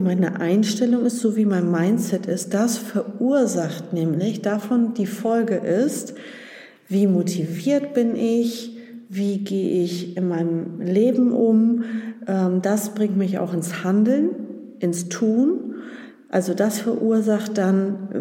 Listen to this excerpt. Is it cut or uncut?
uncut